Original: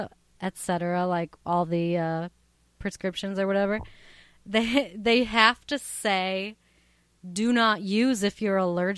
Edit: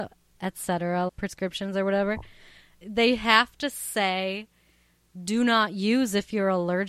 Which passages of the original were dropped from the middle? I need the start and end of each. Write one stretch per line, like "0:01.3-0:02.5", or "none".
0:01.1-0:02.7
0:04.4-0:04.9